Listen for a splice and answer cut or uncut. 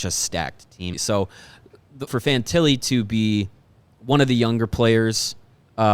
cut